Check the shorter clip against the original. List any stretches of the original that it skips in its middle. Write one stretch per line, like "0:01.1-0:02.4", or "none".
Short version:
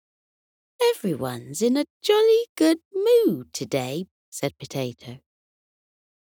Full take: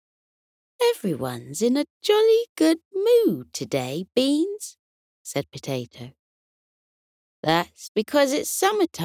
0:04.1-0:05.0